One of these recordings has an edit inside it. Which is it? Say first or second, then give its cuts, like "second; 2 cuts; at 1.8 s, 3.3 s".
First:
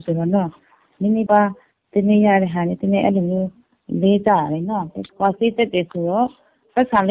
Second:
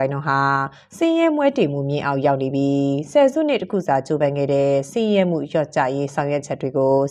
first; 1 cut; at 1.3 s